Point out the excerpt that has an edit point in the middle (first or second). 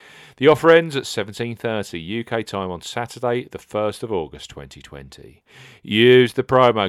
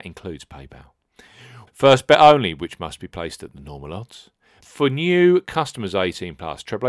second